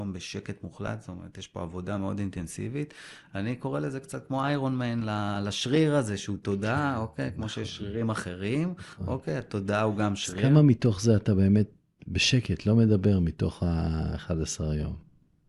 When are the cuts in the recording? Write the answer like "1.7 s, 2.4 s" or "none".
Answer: none